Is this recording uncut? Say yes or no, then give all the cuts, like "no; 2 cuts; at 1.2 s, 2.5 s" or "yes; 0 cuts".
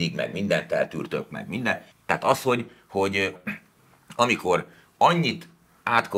no; 2 cuts; at 1.9 s, 3.4 s